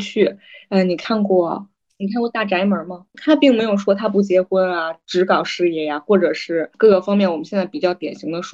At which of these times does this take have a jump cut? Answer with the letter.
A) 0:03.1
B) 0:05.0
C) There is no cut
A